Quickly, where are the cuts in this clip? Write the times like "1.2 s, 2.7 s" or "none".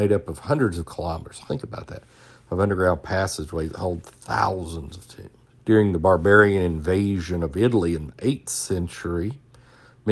1.5 s, 5.6 s